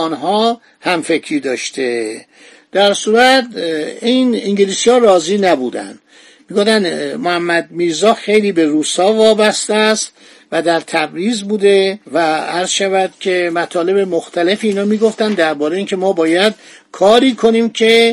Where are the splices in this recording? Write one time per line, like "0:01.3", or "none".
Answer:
0:12.0